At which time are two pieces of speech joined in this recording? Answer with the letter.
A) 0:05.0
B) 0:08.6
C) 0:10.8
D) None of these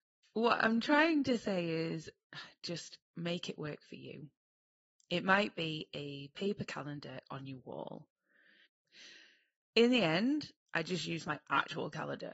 B